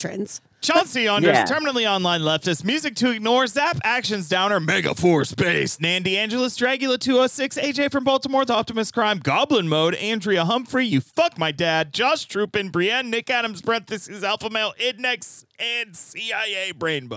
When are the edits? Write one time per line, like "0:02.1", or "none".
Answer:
0:08.5
0:11.3